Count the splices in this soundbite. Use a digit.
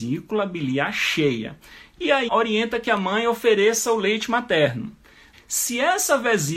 2